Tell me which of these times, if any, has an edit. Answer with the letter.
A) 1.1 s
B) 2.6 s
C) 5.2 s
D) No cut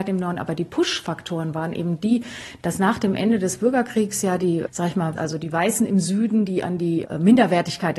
C